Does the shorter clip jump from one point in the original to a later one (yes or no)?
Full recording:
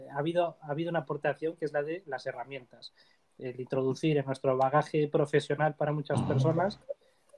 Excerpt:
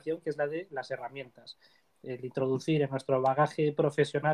no